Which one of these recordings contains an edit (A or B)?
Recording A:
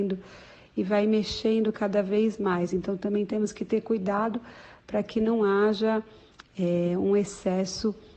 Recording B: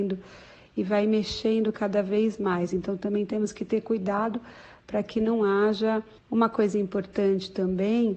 B